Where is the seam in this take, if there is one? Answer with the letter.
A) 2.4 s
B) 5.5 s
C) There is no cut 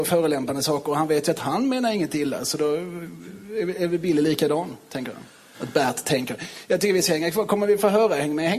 B